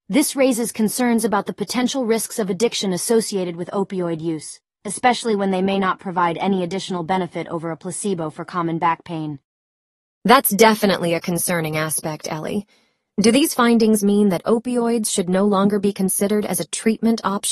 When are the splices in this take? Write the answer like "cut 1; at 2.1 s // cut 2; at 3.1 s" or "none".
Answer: none